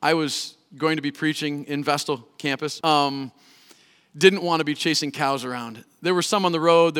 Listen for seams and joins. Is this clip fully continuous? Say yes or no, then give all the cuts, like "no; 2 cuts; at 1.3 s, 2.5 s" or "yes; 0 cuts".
no; 1 cut; at 2.8 s